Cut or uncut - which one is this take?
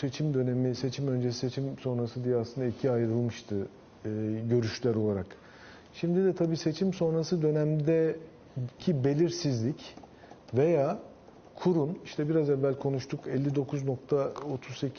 uncut